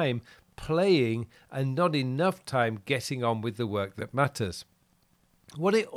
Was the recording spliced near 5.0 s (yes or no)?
no